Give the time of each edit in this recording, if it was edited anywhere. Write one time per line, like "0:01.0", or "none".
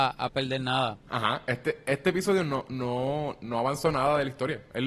none